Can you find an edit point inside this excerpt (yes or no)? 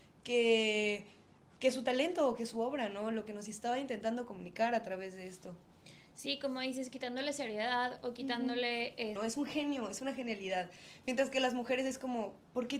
yes